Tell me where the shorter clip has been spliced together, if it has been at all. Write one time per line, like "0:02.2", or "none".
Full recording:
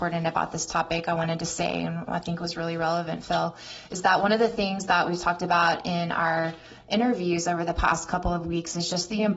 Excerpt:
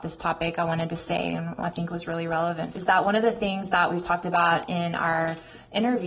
0:02.7